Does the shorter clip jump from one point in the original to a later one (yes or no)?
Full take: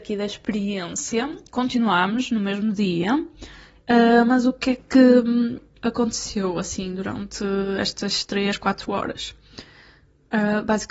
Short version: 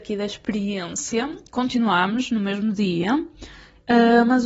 no